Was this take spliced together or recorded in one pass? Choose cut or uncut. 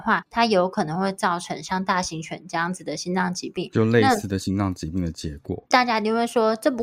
cut